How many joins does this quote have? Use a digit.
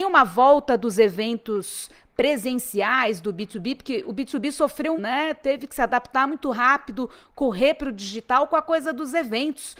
1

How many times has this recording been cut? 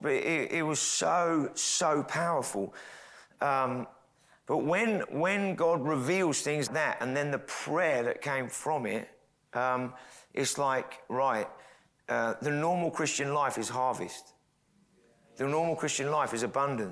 1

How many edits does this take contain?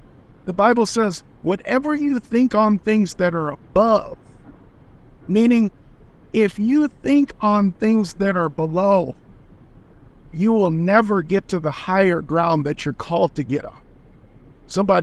1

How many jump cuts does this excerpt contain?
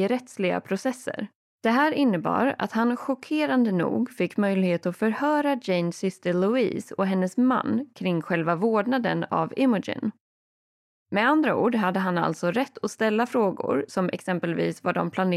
1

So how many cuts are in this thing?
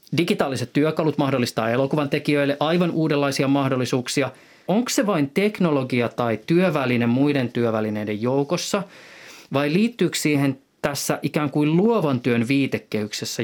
1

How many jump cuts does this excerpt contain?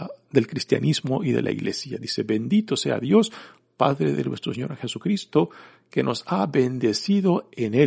0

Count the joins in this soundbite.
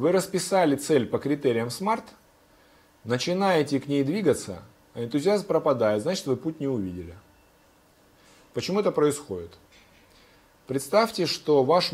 0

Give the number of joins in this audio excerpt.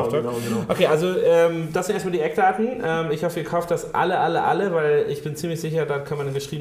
0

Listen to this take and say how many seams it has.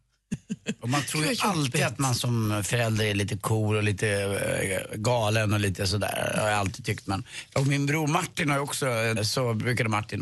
1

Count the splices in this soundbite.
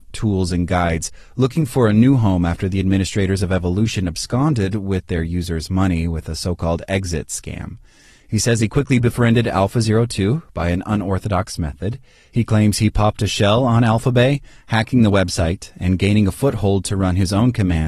0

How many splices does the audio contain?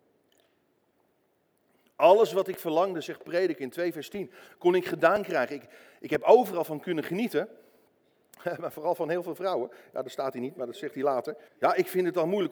1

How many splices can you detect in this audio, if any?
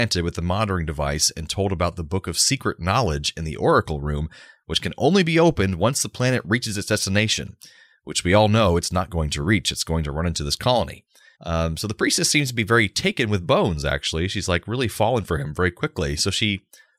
1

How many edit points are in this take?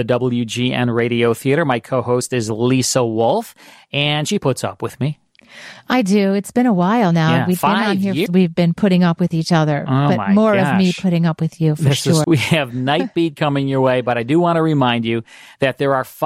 2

